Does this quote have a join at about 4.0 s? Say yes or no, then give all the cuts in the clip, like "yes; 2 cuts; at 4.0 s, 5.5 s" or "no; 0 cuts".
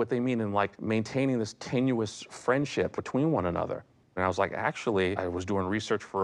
yes; 1 cut; at 4.0 s